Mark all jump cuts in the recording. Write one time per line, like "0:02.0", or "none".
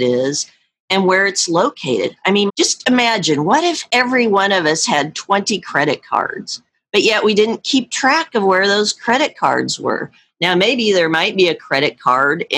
0:02.5